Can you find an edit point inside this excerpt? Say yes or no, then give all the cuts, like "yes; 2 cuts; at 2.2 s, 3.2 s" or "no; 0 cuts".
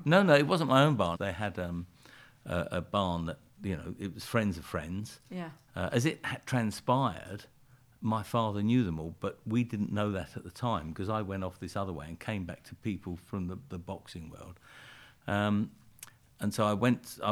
yes; 1 cut; at 1.1 s